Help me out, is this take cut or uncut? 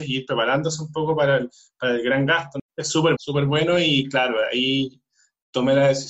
cut